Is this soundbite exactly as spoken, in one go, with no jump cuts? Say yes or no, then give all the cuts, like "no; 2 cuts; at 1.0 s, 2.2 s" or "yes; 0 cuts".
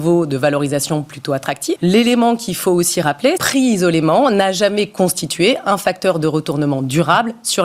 no; 2 cuts; at 1.8 s, 3.4 s